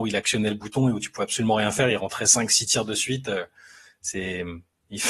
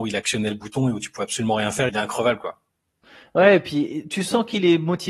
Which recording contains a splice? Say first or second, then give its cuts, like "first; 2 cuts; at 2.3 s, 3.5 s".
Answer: second; 1 cut; at 1.9 s